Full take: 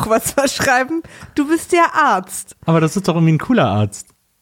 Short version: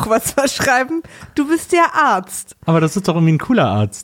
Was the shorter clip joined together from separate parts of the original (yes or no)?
no